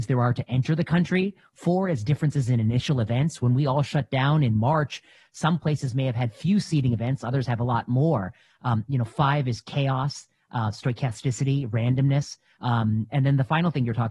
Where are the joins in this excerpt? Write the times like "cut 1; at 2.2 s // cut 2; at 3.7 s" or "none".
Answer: cut 1; at 12.6 s